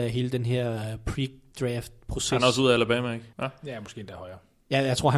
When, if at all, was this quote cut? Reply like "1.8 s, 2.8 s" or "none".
3.3 s